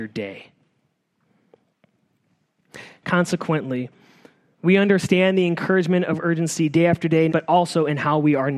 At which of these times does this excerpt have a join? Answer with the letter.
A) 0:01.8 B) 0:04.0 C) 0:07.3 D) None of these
C